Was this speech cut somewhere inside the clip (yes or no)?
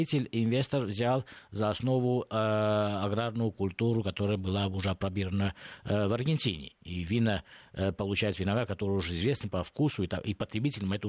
no